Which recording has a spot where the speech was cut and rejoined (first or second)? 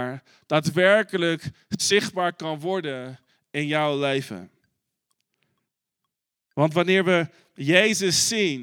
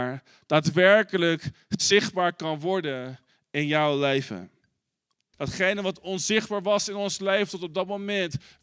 second